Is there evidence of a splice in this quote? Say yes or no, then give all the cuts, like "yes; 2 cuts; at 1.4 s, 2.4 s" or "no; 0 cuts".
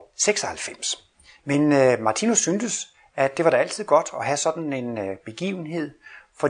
yes; 1 cut; at 1.4 s